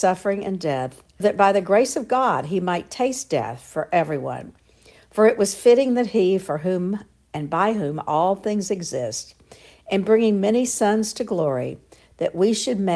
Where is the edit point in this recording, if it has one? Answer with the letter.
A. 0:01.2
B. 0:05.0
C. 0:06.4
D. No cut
A